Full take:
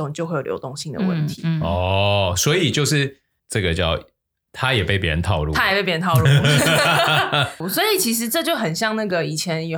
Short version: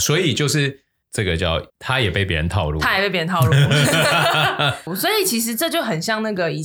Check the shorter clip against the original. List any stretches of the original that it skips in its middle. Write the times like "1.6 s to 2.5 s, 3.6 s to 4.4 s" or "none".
4.1 s to 4.4 s